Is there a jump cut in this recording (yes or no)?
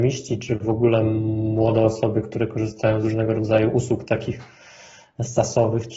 no